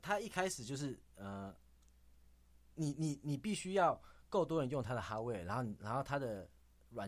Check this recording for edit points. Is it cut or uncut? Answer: uncut